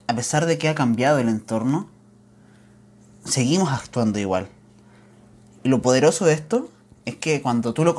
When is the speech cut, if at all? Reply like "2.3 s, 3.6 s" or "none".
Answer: none